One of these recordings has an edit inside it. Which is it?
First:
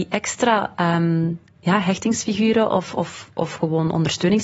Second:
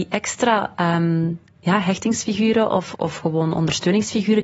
second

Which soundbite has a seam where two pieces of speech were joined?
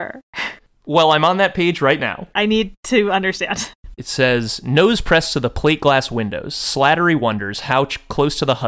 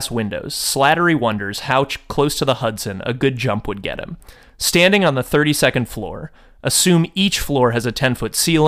first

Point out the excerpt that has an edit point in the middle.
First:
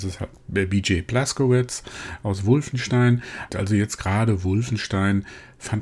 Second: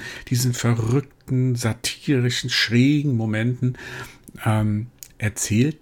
first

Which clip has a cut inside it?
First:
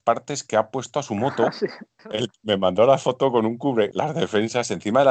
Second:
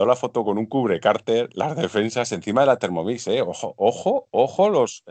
first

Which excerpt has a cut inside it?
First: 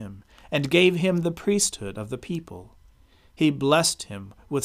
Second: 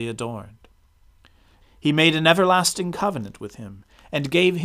second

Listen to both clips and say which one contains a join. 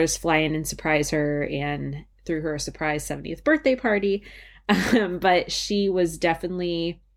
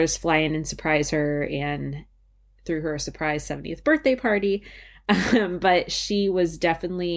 first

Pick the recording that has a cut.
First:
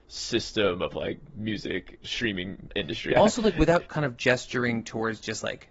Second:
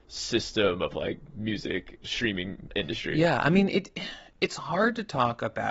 first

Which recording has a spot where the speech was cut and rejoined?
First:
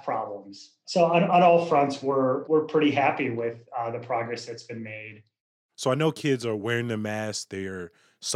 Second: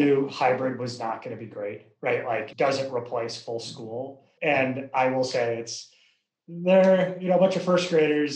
second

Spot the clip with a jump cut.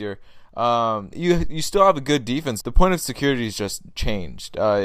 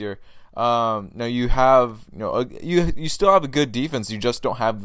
first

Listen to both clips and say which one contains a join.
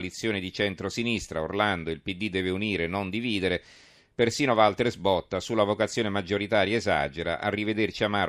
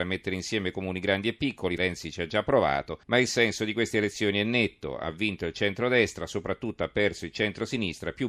second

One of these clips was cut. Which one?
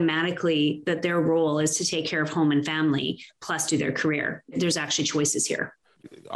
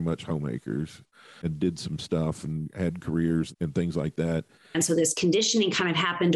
second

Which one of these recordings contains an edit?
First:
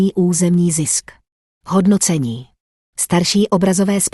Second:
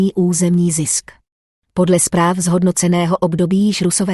second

